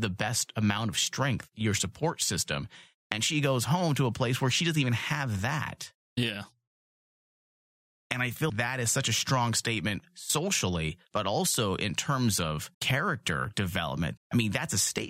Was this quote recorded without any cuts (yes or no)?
no